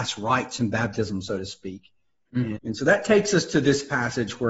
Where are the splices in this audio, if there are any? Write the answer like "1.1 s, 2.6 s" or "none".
2.6 s